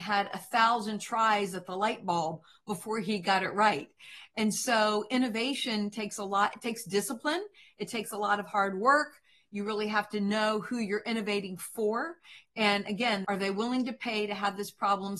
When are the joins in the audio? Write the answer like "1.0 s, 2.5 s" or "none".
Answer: 13.2 s